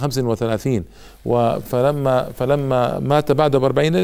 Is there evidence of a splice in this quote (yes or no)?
no